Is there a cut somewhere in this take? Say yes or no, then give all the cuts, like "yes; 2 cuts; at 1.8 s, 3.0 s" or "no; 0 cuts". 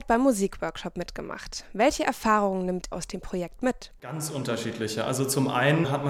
yes; 1 cut; at 2.9 s